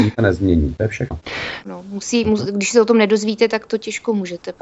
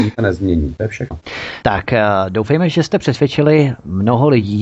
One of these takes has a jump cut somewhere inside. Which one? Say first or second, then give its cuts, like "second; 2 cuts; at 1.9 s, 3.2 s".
first; 1 cut; at 1.6 s